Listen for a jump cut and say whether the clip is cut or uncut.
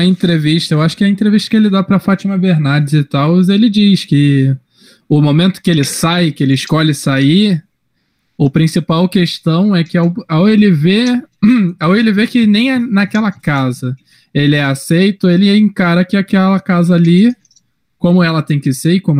uncut